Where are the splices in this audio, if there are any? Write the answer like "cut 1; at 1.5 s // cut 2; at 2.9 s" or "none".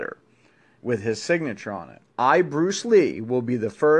cut 1; at 2.0 s